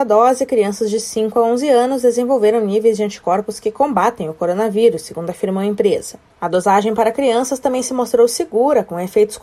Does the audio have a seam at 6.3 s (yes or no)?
no